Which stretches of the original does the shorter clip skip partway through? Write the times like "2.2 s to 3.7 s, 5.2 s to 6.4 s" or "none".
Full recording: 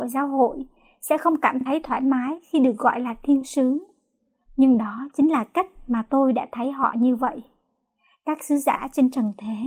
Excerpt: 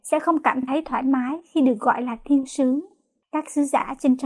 4.2 s to 8.2 s